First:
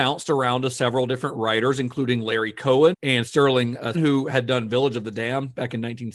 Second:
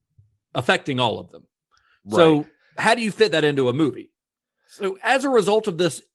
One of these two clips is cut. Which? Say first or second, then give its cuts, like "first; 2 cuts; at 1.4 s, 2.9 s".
first; 2 cuts; at 2.9 s, 3.9 s